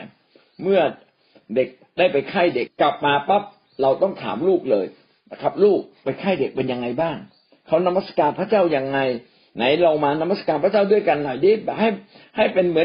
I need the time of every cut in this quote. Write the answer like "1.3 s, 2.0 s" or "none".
2.7 s